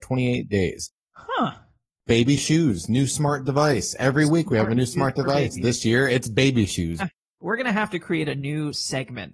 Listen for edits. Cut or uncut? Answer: cut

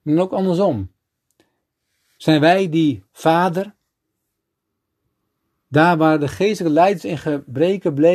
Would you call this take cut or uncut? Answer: uncut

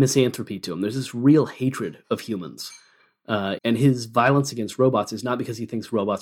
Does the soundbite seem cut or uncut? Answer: cut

